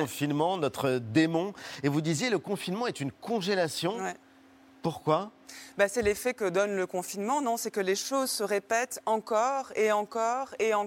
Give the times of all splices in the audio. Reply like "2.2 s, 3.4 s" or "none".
none